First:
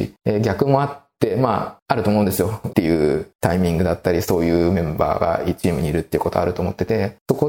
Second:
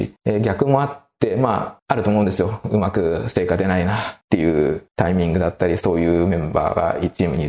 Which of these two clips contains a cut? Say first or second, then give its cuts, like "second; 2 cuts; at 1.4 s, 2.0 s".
first; 1 cut; at 2.7 s